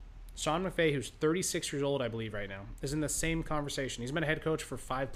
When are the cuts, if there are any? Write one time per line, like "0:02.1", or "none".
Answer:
none